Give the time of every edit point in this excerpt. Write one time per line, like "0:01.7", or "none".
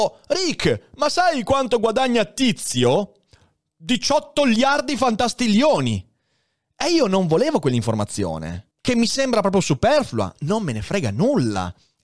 0:08.7